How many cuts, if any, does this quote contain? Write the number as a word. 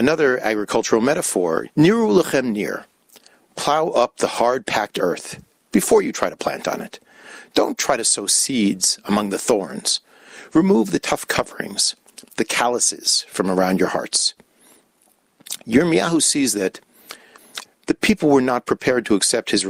two